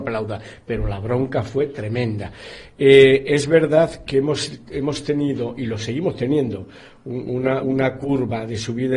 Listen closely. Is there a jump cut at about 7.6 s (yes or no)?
no